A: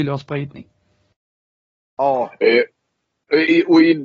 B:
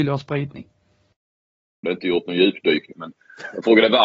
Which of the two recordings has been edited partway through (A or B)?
B